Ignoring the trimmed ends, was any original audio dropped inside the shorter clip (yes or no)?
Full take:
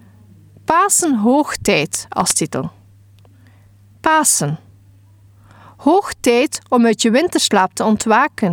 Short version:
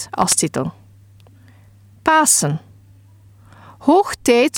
no